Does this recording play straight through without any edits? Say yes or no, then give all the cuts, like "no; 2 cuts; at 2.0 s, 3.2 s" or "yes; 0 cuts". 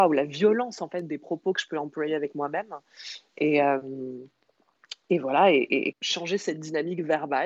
no; 1 cut; at 5.9 s